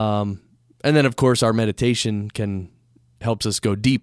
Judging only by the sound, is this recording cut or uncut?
uncut